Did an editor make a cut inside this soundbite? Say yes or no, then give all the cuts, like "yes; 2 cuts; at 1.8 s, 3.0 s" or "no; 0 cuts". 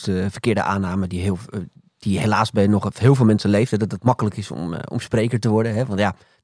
no; 0 cuts